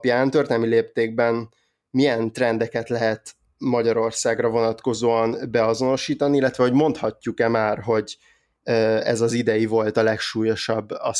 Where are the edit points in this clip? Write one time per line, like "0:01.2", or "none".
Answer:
none